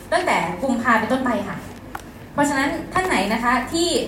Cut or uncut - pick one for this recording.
uncut